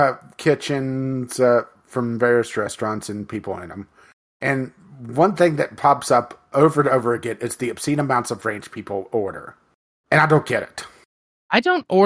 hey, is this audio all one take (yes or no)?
yes